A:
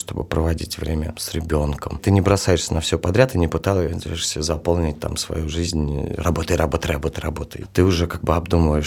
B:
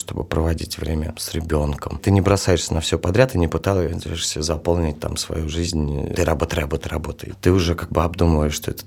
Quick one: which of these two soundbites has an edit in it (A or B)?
B